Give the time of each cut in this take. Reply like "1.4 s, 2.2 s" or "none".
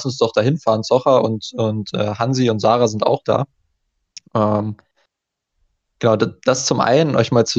none